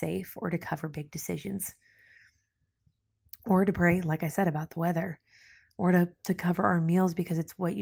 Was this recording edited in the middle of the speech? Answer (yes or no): no